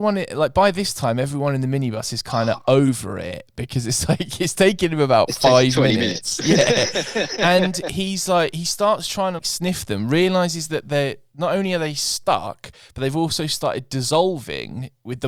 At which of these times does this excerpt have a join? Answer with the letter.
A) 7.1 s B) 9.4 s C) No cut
B